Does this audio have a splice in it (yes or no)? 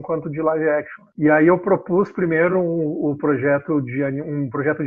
no